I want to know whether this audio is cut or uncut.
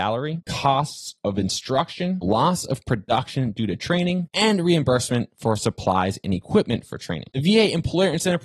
uncut